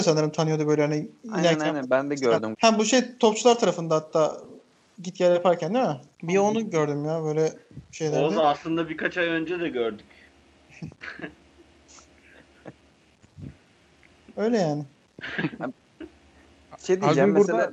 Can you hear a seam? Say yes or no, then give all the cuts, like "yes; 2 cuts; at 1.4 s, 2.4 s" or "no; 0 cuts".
yes; 3 cuts; at 2.5 s, 6.1 s, 10.9 s